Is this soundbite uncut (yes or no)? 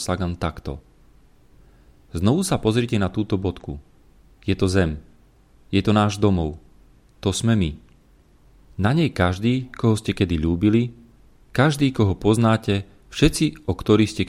yes